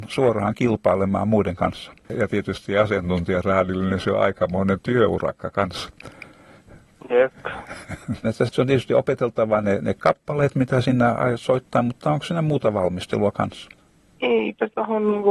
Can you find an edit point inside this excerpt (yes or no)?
yes